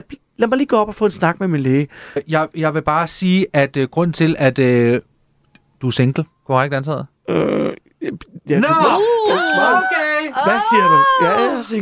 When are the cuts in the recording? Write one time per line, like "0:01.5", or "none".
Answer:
0:02.2